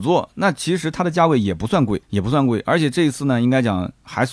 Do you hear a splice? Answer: no; 0 cuts

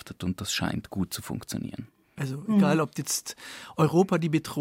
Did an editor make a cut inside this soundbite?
no; 0 cuts

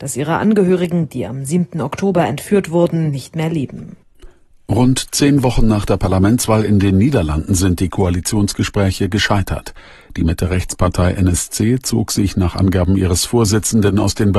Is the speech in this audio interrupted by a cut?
no; 0 cuts

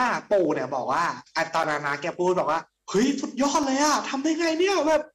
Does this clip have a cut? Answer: no; 0 cuts

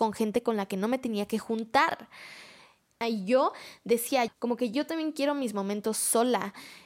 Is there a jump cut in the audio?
yes; 2 cuts; at 3.0 s, 4.3 s

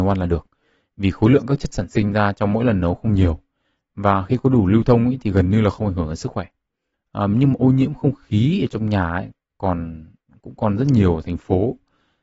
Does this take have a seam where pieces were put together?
yes; 1 cut; at 6.9 s

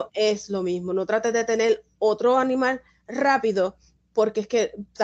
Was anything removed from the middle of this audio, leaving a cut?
no; 0 cuts

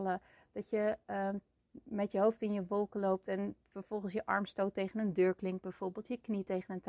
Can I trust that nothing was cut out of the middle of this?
yes; 0 cuts

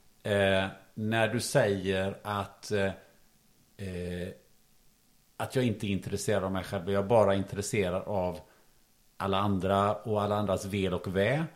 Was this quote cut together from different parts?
no; 0 cuts

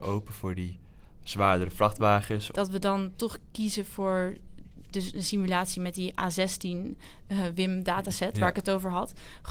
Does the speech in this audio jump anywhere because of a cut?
yes; 1 cut; at 2.5 s

